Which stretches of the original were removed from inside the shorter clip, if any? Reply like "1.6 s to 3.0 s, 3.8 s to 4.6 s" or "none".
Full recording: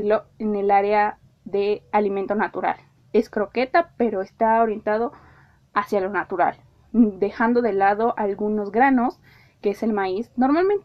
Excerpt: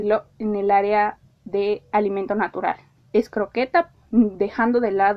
3.9 s to 6.8 s